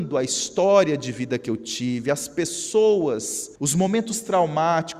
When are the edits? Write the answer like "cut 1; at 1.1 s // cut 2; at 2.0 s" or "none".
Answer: cut 1; at 3.6 s